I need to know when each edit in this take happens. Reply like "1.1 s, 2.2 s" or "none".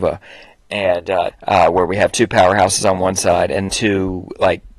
1.3 s, 3.7 s